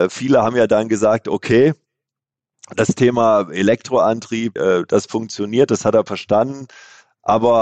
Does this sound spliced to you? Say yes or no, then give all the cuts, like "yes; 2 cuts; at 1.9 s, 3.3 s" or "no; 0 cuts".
yes; 1 cut; at 4.6 s